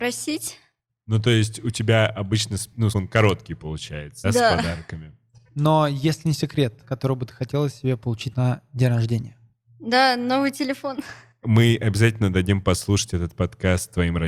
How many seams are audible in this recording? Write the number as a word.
three